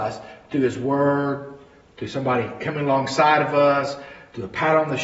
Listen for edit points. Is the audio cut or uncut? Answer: uncut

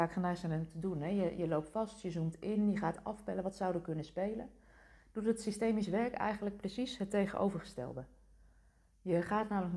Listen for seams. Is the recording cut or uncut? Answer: uncut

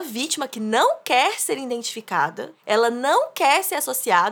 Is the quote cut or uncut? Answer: uncut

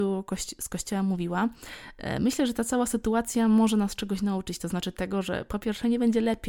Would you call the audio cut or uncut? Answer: uncut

